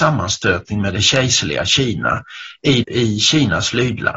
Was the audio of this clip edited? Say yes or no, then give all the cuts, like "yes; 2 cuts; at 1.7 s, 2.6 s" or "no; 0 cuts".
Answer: yes; 1 cut; at 2.8 s